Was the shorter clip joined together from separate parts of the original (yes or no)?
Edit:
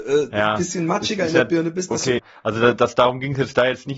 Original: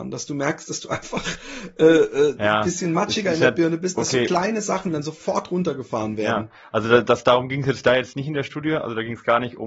yes